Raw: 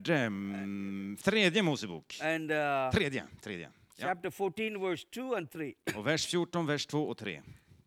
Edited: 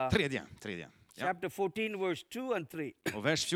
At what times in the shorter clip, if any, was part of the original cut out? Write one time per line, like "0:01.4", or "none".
none